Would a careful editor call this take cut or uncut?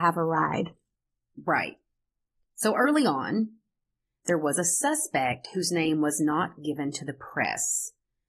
uncut